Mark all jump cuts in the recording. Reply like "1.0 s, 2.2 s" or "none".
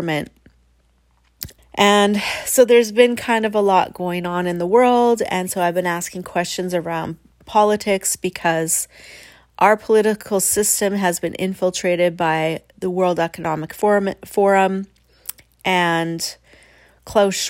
1.6 s, 12.7 s